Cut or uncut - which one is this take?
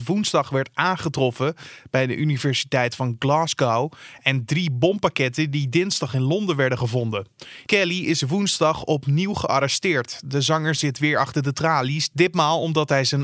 cut